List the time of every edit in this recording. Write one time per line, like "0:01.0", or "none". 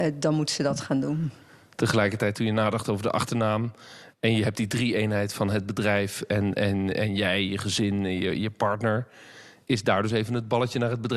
none